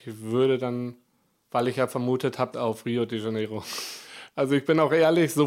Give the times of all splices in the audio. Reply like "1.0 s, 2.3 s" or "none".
2.5 s, 4.3 s